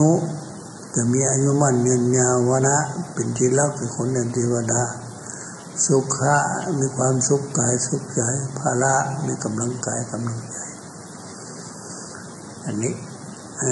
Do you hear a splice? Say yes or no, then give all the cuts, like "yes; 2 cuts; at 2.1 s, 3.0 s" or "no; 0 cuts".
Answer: yes; 1 cut; at 2.6 s